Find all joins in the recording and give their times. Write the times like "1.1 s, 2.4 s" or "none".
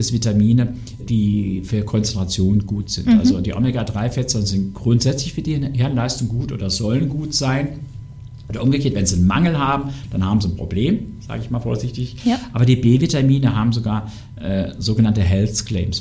1.0 s